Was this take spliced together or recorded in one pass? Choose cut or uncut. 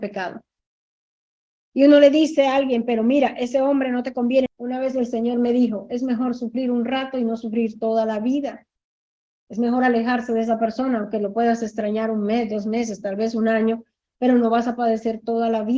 cut